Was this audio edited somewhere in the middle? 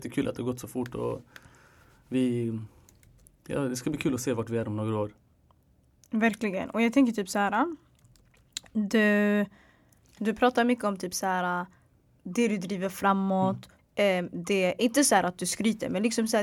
yes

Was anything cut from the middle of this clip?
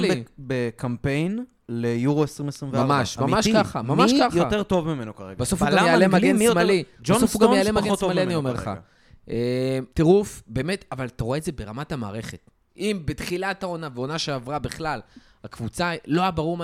yes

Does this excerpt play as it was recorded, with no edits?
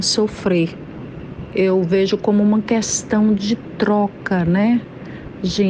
yes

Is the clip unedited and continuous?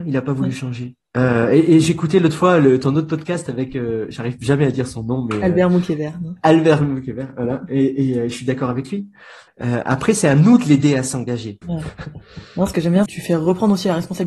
no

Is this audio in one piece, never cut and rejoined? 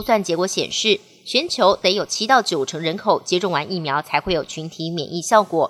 yes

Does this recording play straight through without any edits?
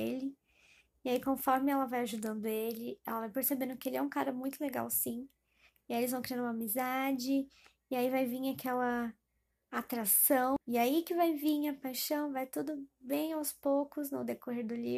no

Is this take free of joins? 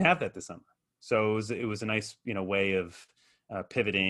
yes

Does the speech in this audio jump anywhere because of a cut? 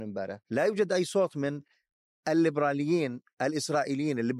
no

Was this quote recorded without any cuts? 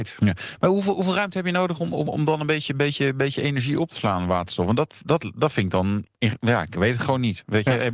no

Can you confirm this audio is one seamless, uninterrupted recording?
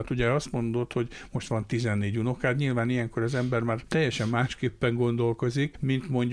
yes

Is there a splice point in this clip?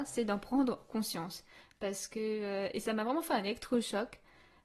no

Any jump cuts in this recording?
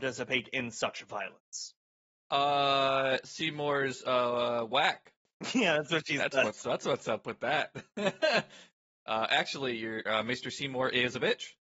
yes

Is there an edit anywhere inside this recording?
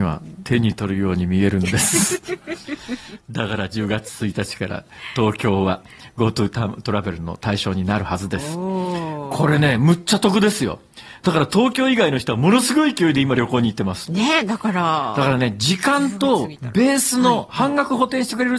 no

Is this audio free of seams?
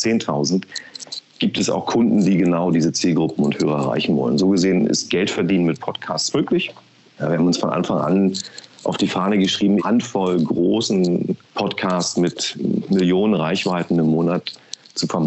no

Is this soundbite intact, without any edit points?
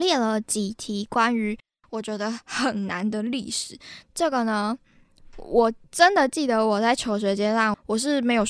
no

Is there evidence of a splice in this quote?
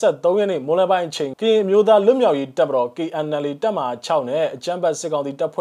yes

